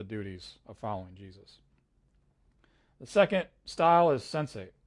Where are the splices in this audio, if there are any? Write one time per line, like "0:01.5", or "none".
none